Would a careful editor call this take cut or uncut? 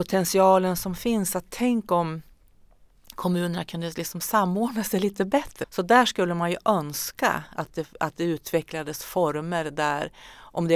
cut